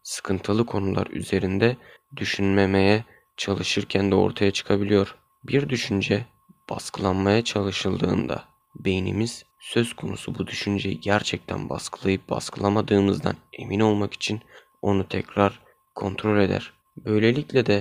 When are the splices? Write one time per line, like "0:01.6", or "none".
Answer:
0:15.1